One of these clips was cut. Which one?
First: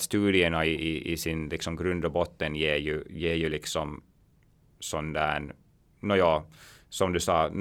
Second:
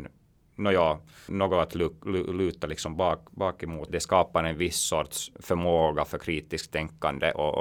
second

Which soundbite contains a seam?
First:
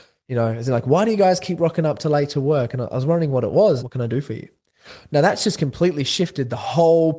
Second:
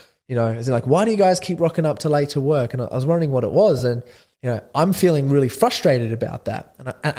first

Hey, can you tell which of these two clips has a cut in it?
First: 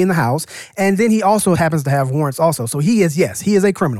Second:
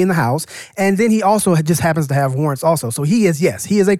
first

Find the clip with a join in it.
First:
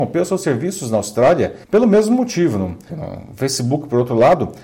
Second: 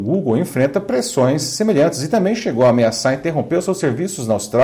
first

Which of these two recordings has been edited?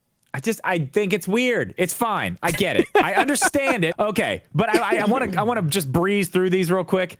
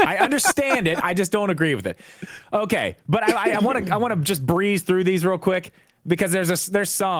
first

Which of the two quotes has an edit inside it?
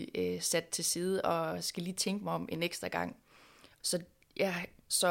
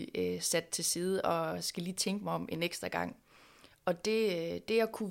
first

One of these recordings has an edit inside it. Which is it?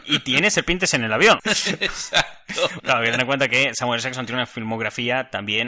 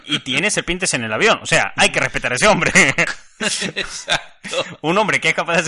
first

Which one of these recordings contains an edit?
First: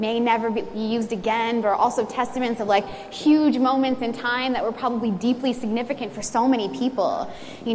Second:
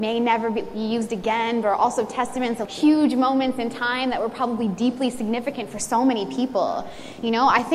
second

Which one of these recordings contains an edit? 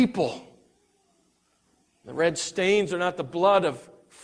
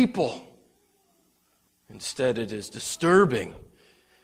second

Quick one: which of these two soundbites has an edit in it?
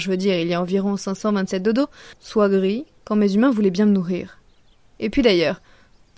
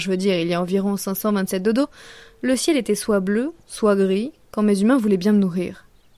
first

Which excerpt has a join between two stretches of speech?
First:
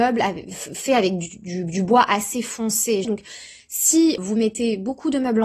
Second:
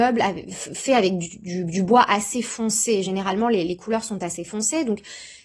first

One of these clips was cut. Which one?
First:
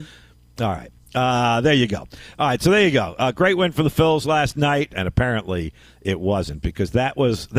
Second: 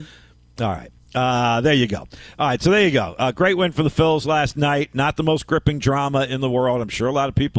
first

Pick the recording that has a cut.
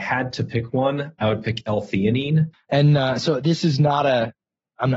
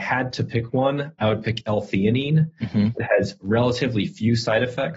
first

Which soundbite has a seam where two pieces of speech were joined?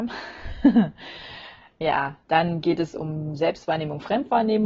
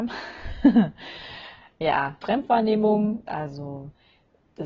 second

